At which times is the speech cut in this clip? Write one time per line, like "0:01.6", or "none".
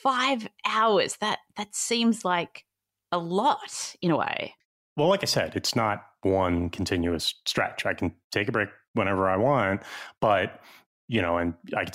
none